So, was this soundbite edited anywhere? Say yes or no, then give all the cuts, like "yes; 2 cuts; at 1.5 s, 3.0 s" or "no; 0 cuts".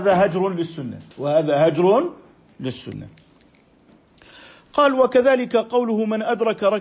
yes; 1 cut; at 1.1 s